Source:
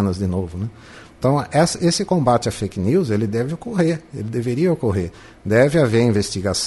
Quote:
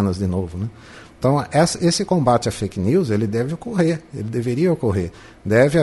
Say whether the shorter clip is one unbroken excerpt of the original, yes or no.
yes